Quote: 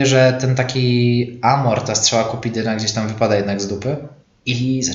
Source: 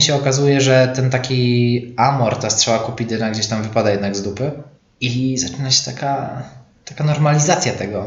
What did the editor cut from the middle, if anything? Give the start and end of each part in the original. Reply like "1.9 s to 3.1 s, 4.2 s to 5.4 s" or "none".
none